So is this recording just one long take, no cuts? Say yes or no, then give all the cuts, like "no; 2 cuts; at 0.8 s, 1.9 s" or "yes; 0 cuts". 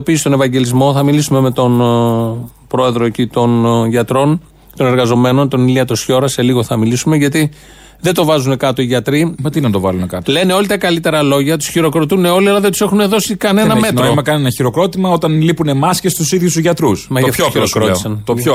yes; 0 cuts